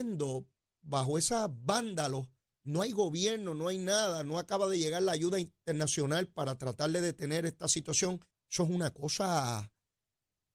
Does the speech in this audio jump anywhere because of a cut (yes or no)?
yes